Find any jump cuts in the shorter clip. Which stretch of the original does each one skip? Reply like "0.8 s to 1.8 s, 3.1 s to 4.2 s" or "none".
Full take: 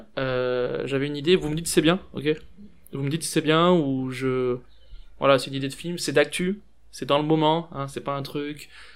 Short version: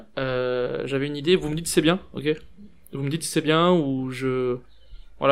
none